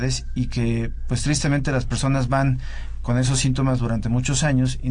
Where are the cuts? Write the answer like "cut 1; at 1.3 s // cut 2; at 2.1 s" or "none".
none

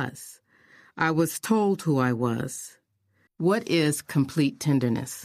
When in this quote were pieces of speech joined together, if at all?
cut 1; at 3.3 s

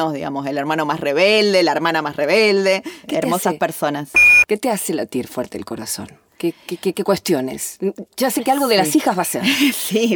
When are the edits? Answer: none

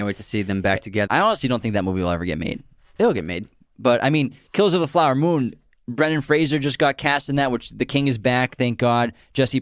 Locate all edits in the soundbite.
cut 1; at 1.1 s

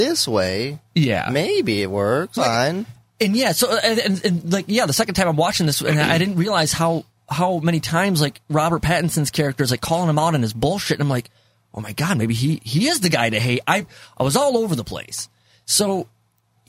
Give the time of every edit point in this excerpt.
cut 1; at 2.4 s

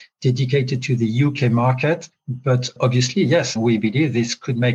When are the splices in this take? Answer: cut 1; at 3.6 s

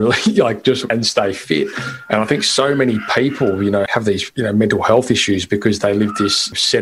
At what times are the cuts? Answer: none

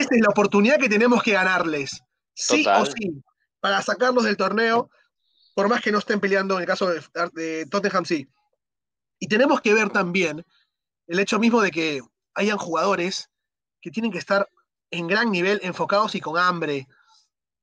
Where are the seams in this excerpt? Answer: none

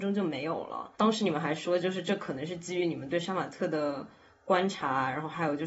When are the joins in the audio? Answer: cut 1; at 0.9 s

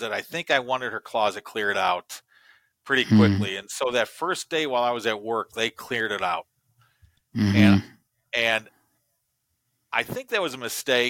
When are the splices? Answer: none

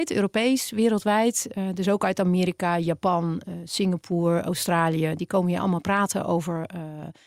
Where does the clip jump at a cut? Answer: none

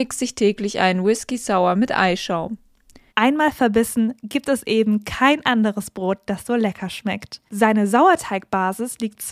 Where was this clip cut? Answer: cut 1; at 3.1 s // cut 2; at 7.5 s

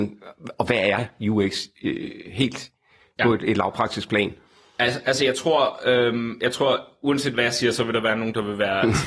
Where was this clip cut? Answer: none

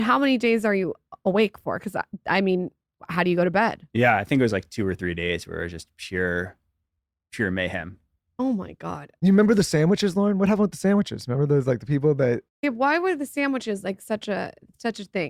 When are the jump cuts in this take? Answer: none

